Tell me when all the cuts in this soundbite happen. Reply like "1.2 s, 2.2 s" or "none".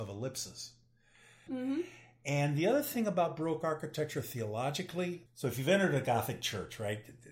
1.5 s, 5.3 s